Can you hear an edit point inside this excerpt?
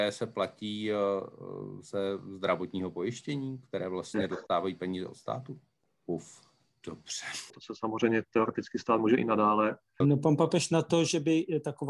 yes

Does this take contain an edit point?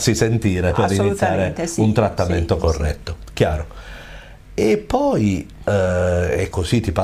no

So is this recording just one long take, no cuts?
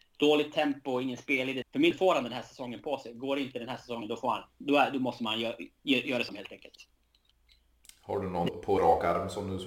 no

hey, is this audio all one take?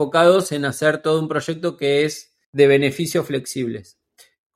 no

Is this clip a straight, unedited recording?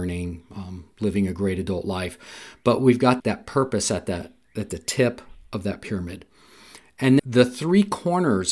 no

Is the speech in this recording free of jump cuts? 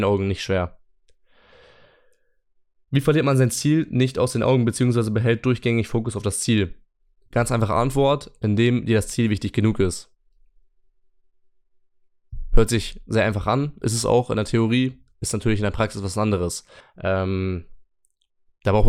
no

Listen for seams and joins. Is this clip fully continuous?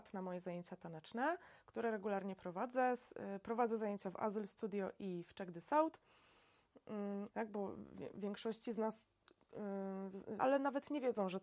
no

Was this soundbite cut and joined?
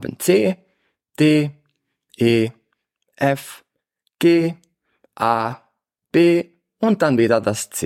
no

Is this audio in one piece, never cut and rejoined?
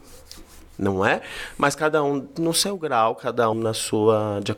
no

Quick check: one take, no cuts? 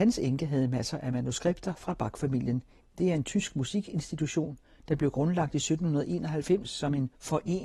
no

